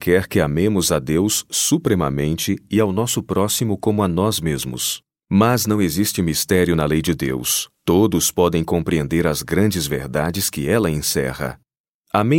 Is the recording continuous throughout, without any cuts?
no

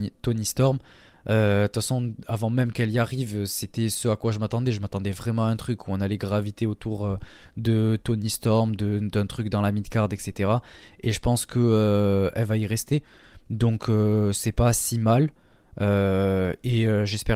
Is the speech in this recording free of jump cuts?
yes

